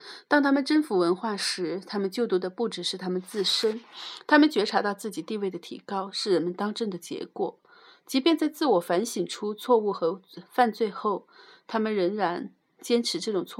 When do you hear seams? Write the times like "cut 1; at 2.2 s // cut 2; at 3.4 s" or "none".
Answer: none